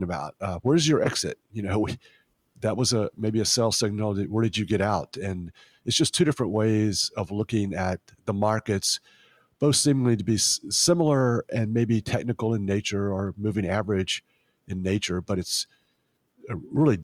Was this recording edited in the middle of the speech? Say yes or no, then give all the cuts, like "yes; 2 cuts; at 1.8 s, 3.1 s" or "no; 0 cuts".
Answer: no; 0 cuts